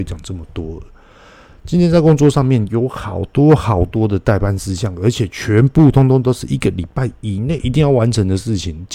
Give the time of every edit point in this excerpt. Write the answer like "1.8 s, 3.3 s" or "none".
none